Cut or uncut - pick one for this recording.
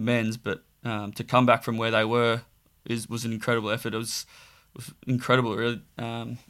uncut